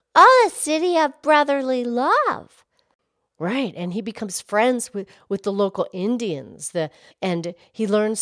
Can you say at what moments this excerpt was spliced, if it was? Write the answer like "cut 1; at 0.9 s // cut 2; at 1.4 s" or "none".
cut 1; at 7.1 s